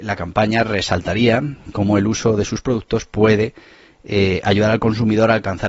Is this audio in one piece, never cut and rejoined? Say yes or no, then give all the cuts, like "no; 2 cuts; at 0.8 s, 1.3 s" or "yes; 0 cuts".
yes; 0 cuts